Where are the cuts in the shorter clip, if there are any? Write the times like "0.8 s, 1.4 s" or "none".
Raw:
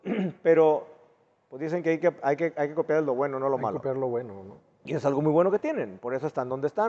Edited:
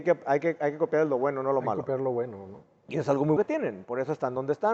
3.4 s